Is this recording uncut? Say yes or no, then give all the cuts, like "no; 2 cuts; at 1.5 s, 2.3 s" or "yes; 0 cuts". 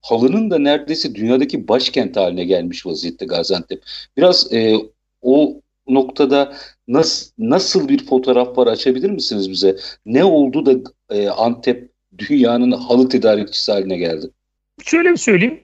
yes; 0 cuts